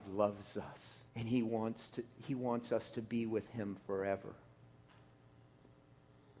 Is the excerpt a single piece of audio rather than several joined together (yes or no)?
no